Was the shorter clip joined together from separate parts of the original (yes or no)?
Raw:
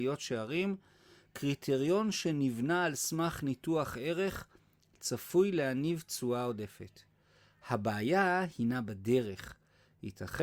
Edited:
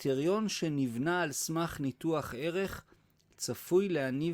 no